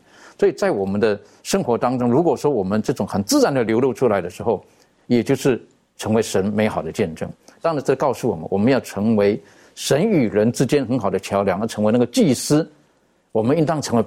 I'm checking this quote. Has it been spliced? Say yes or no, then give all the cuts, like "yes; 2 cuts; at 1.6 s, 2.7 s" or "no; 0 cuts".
no; 0 cuts